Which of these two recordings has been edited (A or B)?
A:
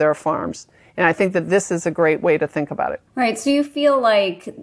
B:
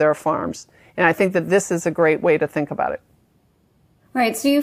A